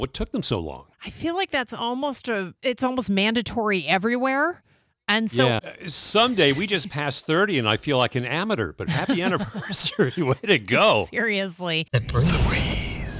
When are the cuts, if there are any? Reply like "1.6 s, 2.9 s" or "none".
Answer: 5.6 s